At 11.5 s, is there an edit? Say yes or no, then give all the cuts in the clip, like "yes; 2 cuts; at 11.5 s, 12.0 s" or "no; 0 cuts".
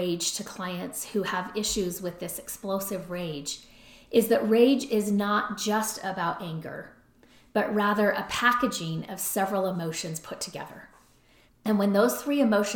yes; 1 cut; at 11.5 s